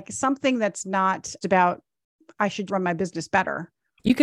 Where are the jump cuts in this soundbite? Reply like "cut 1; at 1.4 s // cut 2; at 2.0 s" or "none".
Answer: cut 1; at 1.4 s // cut 2; at 2.7 s